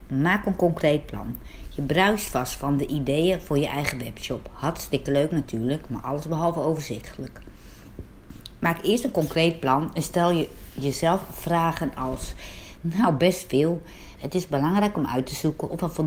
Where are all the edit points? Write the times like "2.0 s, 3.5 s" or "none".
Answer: 12.8 s, 14.2 s